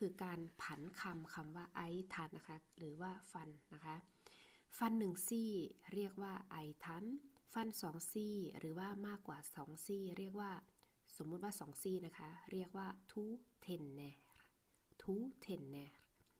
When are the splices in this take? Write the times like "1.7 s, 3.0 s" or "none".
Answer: 2.3 s